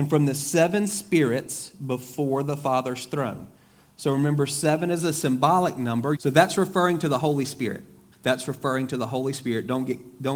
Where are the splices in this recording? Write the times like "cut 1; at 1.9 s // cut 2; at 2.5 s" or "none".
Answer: cut 1; at 6.2 s // cut 2; at 8.1 s